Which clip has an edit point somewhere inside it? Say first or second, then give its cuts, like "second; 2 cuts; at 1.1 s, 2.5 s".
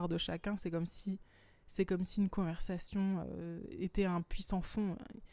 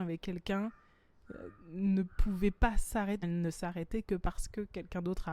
second; 1 cut; at 3.2 s